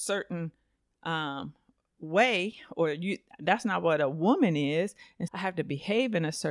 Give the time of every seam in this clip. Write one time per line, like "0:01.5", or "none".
0:05.3